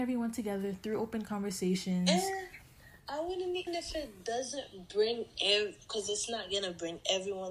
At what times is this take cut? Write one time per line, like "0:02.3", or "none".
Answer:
0:03.7